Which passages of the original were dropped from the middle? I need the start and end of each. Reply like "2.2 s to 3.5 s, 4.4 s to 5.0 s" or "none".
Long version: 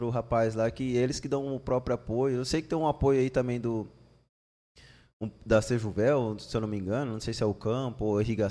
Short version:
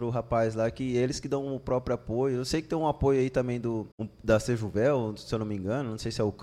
3.9 s to 5.1 s